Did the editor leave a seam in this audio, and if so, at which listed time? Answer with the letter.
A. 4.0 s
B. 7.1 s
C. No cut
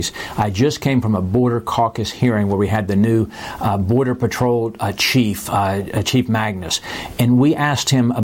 C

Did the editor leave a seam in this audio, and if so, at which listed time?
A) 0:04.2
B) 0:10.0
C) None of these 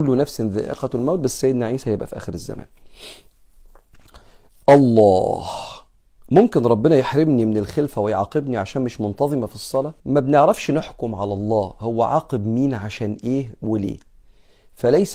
B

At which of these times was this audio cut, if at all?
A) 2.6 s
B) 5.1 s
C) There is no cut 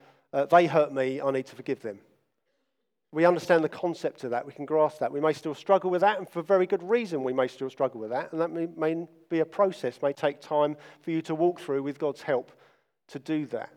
C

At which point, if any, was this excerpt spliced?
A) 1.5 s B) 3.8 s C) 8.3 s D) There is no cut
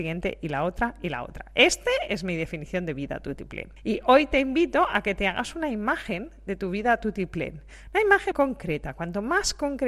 C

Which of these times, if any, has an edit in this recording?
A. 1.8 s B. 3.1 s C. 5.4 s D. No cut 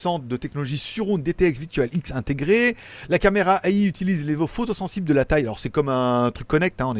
D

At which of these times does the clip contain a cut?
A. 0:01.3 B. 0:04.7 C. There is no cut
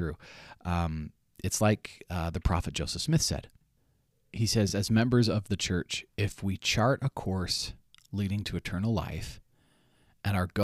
C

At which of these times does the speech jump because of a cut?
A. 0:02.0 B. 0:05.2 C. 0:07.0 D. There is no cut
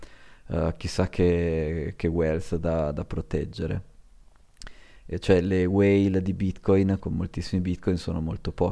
C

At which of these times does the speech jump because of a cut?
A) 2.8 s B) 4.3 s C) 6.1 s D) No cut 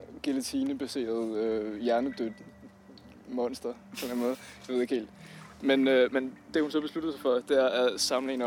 D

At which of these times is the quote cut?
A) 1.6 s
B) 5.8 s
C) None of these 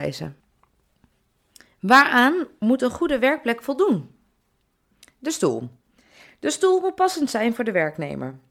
C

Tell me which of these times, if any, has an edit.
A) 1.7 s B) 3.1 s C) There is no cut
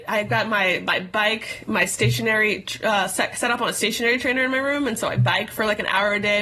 C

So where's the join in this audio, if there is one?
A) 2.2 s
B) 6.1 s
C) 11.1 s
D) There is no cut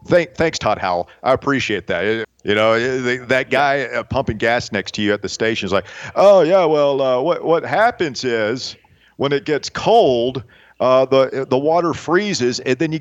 A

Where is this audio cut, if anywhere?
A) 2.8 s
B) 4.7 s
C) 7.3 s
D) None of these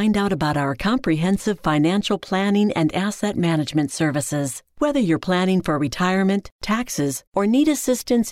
C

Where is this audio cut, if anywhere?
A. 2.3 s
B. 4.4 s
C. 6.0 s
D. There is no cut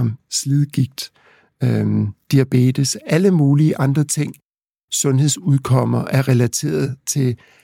A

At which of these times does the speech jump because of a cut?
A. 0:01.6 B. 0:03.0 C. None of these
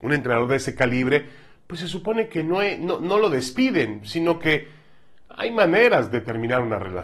B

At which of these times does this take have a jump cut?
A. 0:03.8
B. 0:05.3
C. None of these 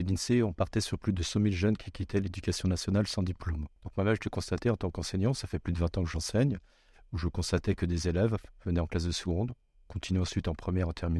A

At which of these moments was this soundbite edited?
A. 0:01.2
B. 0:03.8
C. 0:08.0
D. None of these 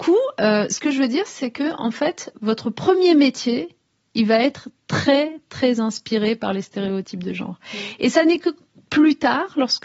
D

